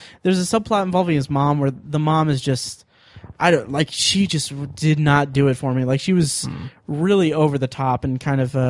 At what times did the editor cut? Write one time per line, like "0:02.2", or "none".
none